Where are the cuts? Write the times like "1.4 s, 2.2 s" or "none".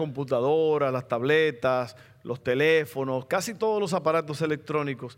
none